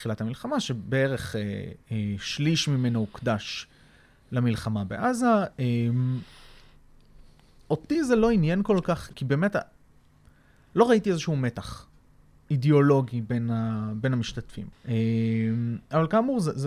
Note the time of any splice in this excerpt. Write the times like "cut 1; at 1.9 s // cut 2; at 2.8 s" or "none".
cut 1; at 9.1 s // cut 2; at 14.7 s